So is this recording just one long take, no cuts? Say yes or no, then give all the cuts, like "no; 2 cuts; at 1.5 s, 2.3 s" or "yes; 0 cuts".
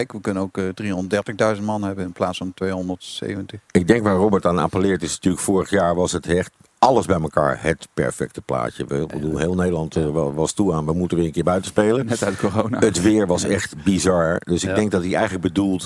yes; 0 cuts